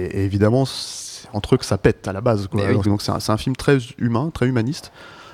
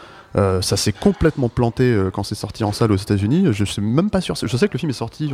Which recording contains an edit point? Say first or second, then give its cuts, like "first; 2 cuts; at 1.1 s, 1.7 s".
first; 1 cut; at 2.8 s